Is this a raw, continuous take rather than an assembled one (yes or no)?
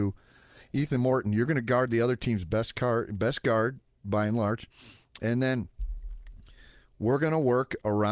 yes